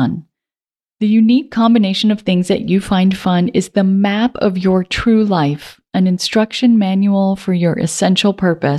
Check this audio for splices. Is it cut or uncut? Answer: uncut